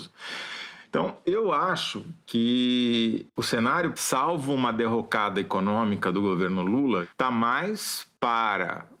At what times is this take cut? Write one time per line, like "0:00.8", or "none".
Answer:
0:03.9